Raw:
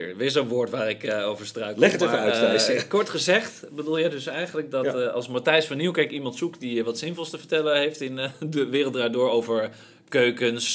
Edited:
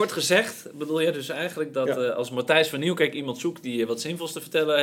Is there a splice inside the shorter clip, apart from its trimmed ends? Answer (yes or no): no